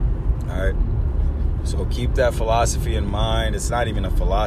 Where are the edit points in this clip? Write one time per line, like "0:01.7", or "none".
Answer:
none